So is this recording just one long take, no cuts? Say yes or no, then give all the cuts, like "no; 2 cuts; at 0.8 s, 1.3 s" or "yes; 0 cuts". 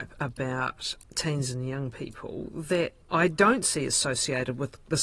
no; 2 cuts; at 1.0 s, 3.0 s